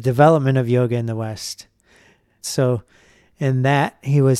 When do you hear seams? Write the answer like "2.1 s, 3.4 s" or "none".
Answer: 2.4 s